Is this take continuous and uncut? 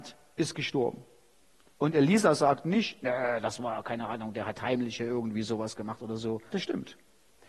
no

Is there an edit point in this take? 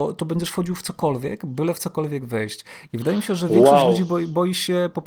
yes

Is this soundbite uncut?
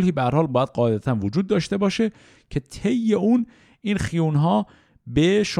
yes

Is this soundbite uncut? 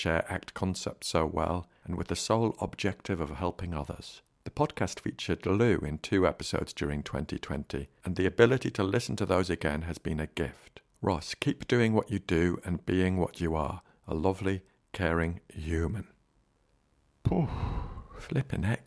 yes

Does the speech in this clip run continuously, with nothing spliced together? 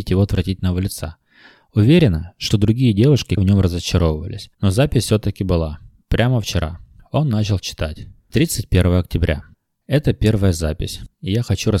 no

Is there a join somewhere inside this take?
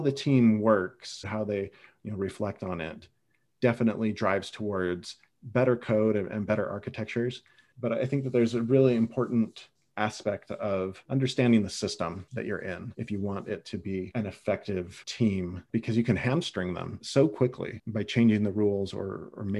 yes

